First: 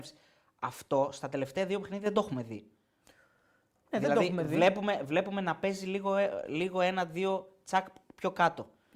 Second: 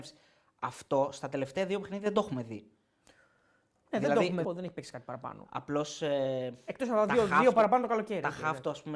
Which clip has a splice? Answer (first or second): second